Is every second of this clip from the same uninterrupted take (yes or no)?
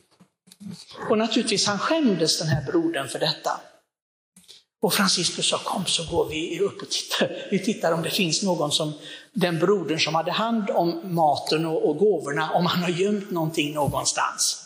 yes